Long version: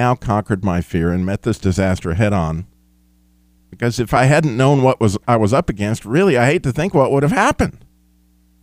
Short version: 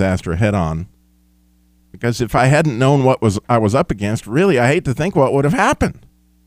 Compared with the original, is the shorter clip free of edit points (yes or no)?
yes